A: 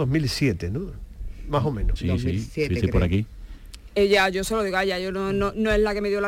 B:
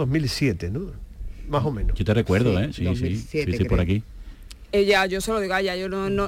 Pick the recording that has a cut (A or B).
A